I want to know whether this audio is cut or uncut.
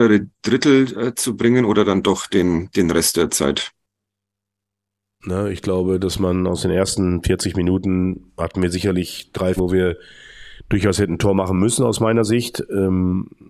cut